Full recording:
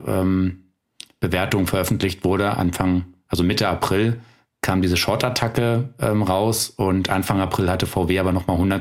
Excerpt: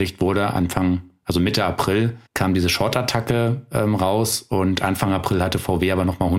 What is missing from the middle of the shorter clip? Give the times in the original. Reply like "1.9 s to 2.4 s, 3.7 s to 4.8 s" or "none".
4.3 s to 4.5 s